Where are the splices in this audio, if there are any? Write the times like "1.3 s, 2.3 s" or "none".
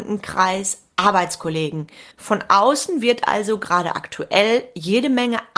2.1 s